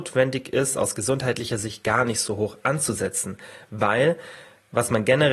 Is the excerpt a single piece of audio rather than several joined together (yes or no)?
yes